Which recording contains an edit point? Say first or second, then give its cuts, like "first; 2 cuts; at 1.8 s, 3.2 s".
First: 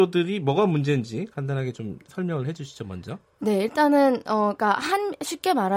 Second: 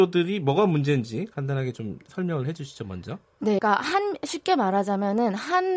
second; 1 cut; at 3.6 s